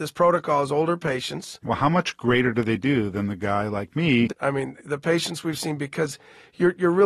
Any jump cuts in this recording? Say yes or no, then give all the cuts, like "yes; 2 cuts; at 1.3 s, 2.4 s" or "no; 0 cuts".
yes; 1 cut; at 4.3 s